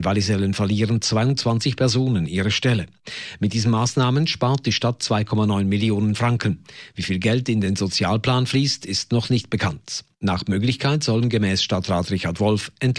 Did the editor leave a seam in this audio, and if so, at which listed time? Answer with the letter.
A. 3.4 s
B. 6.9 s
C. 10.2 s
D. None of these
D